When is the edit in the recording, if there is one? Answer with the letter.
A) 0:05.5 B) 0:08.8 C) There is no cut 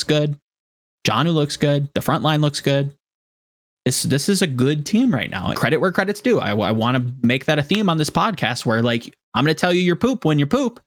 A